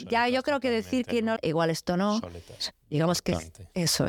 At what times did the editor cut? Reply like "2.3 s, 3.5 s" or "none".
1.4 s, 2.7 s